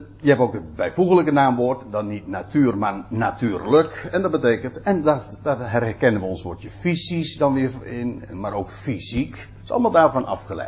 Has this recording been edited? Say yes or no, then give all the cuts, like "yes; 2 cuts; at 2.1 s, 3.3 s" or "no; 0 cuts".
no; 0 cuts